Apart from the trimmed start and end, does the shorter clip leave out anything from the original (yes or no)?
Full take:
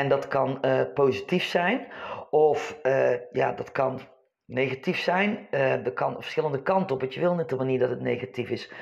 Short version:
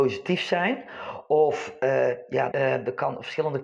yes